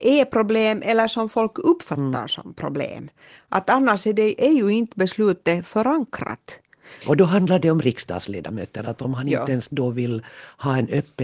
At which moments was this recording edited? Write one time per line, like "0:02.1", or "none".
0:07.0